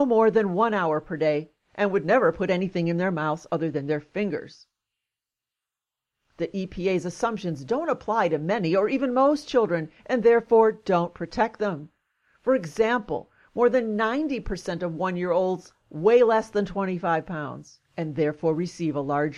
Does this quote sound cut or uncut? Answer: uncut